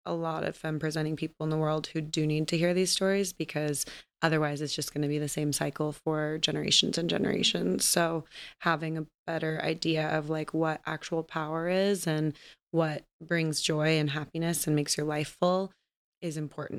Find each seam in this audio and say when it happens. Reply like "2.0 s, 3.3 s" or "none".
13.1 s